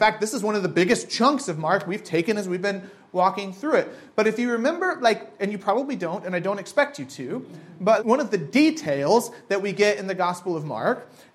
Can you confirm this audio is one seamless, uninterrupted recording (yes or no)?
no